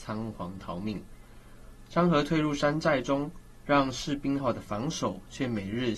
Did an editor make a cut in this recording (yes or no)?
yes